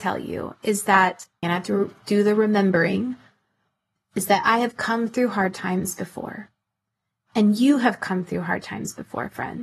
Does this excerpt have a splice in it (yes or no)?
yes